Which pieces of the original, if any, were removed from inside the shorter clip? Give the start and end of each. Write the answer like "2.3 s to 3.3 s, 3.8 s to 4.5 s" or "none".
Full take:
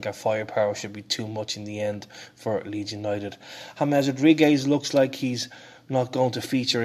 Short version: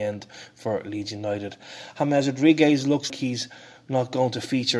4.9 s to 5.1 s

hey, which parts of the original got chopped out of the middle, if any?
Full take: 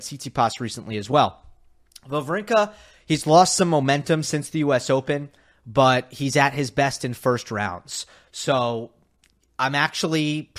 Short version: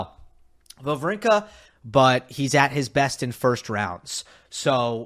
2.9 s to 5.5 s

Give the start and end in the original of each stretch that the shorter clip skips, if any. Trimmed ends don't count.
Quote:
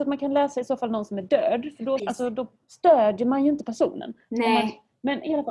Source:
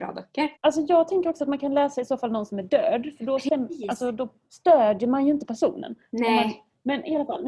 3.4 s to 3.8 s

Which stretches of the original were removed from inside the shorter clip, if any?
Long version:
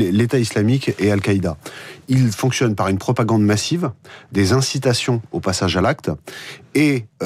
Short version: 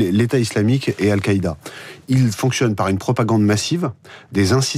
none

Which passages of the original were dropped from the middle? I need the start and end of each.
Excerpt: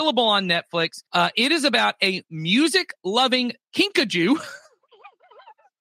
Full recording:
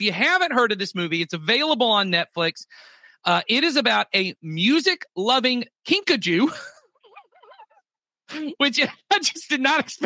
2.7 s to 3.2 s

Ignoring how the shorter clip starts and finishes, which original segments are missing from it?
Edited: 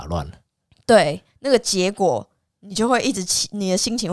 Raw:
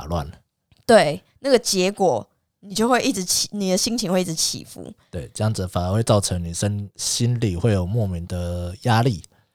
none

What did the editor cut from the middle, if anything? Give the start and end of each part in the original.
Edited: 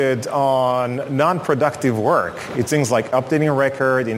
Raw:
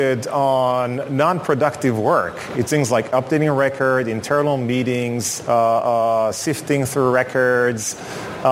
none

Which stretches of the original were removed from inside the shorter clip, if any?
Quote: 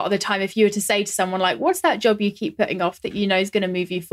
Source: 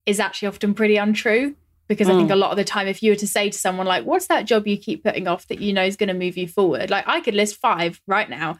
none

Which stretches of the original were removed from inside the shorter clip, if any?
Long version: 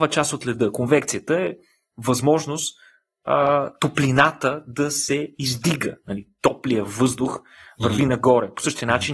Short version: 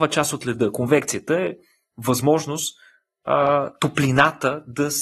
none

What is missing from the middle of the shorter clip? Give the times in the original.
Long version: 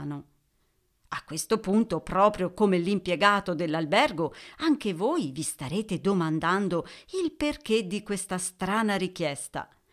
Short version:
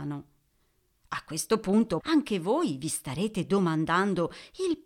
2.0 s to 4.5 s

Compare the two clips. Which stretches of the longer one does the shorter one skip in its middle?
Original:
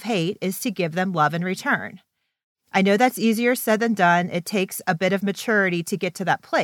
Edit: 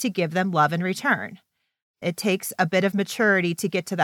2.6 s to 4.3 s

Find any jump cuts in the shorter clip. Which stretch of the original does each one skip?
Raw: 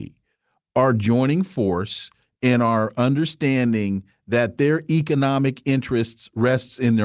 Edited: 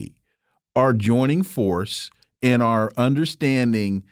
none

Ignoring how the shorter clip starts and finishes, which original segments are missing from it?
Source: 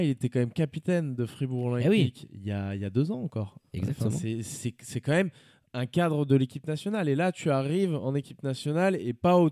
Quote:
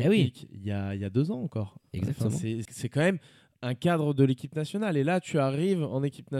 4.5 s to 4.8 s

